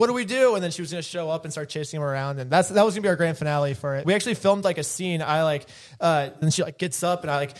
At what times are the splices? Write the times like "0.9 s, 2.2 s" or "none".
4.0 s, 6.4 s